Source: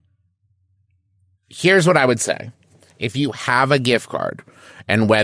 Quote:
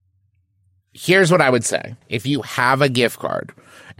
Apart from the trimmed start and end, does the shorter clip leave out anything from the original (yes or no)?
yes